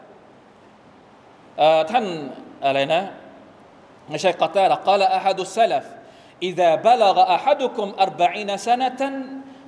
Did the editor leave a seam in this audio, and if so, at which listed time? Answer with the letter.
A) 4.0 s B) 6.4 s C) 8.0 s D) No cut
D